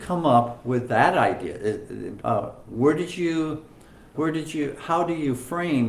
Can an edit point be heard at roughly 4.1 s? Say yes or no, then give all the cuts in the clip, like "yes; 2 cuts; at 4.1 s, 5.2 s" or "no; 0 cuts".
yes; 2 cuts; at 2.2 s, 4.1 s